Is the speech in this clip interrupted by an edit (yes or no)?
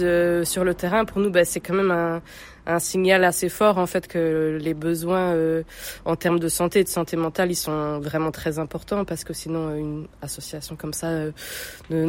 no